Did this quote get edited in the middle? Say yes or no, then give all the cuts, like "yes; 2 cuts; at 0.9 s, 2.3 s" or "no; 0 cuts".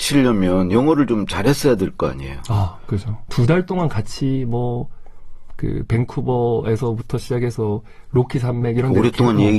yes; 1 cut; at 3.3 s